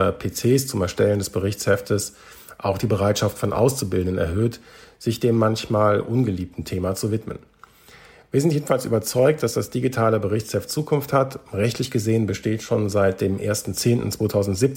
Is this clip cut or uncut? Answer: uncut